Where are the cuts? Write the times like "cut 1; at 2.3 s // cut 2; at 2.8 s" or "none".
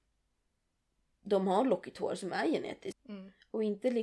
cut 1; at 2.9 s